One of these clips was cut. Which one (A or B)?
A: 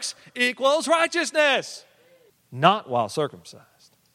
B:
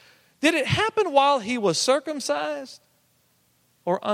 A